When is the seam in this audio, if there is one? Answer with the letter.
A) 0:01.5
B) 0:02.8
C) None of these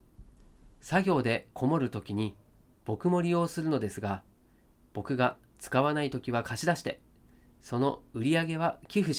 A